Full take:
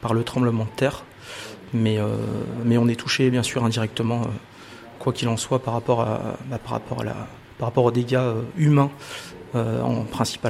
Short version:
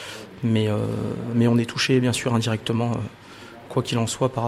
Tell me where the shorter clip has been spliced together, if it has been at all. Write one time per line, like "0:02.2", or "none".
none